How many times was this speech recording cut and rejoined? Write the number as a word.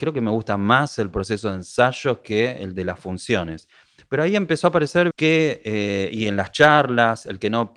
one